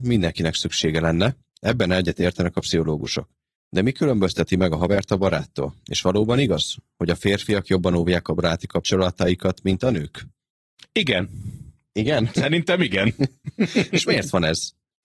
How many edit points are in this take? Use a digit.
0